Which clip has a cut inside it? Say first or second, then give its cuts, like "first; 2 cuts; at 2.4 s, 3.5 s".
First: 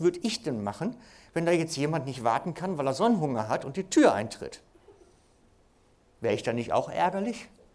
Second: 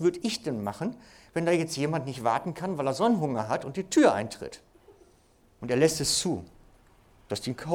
second; 1 cut; at 5.6 s